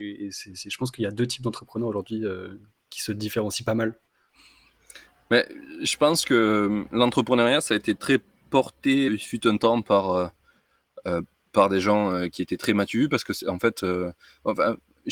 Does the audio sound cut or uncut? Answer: cut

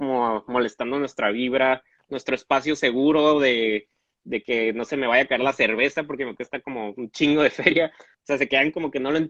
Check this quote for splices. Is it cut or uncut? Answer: cut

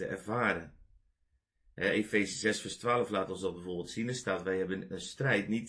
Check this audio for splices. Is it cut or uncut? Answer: uncut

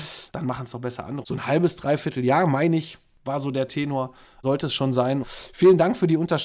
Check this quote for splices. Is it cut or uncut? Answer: cut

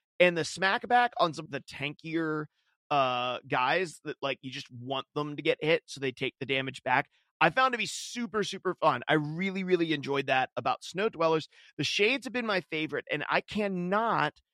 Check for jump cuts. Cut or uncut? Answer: cut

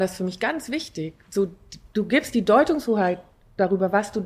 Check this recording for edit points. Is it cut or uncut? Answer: uncut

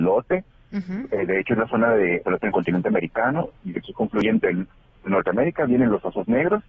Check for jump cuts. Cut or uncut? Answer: cut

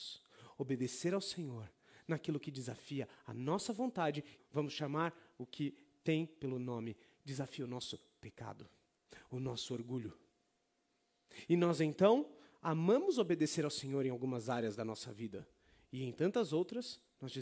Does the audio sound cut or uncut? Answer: cut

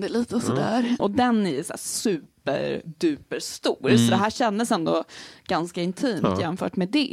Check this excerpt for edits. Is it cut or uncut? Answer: cut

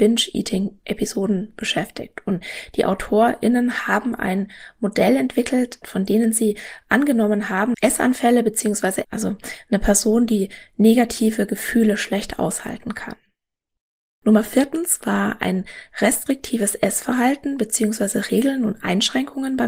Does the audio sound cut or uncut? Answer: cut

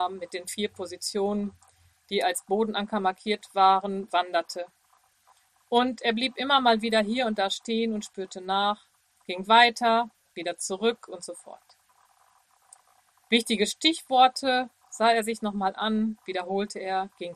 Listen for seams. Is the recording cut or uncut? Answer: uncut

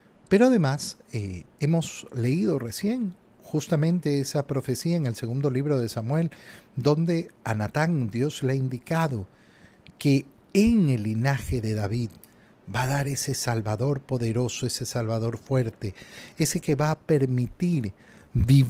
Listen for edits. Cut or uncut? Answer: cut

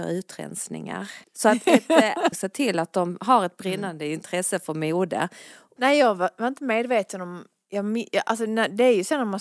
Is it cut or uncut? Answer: cut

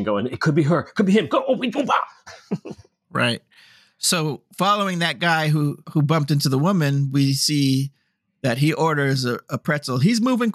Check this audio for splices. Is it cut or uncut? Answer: uncut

